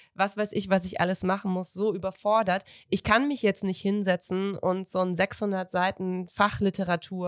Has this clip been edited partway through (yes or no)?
no